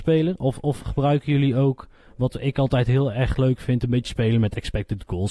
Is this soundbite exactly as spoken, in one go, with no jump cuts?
yes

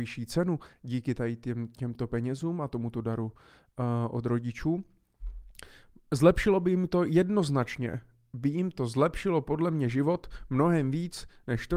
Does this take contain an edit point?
no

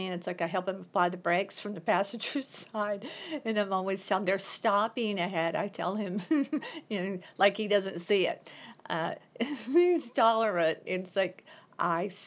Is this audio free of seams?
no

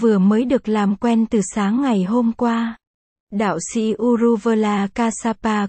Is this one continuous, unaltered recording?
no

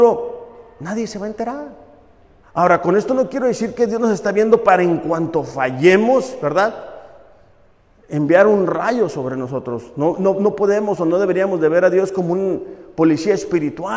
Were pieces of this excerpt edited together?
yes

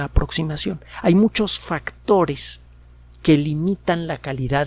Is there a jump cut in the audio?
no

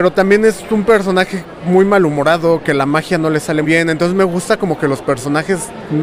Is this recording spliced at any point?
yes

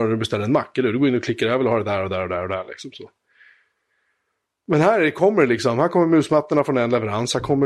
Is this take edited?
no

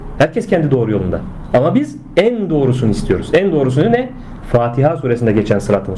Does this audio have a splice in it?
no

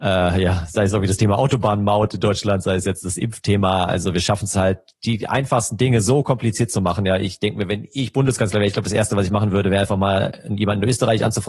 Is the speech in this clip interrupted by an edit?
no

